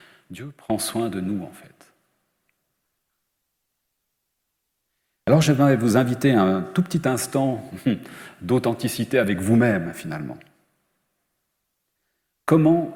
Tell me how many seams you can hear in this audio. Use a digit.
0